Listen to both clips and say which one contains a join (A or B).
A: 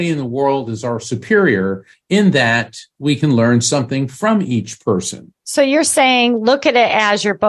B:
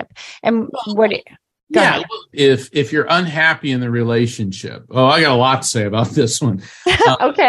B